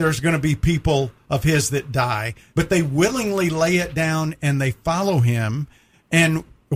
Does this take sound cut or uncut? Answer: cut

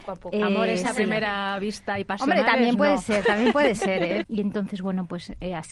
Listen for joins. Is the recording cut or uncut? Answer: cut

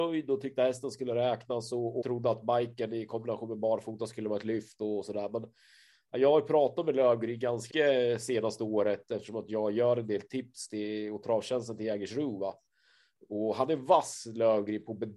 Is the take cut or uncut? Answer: cut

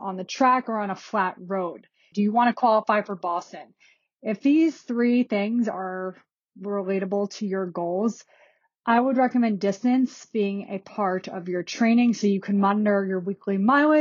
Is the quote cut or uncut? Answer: cut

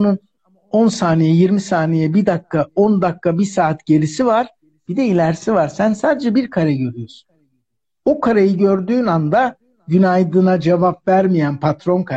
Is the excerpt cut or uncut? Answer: uncut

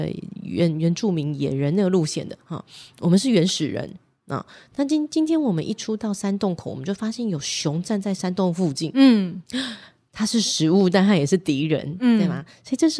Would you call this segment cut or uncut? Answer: uncut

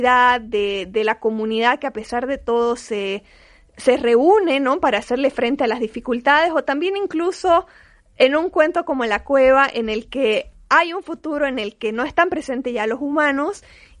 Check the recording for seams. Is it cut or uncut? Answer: uncut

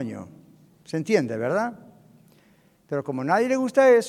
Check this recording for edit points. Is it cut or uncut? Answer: uncut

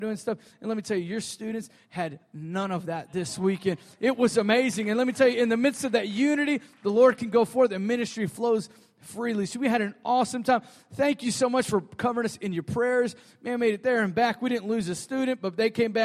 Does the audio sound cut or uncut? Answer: uncut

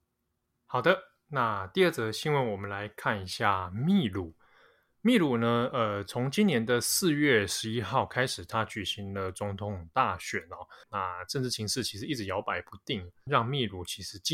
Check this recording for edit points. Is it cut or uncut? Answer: cut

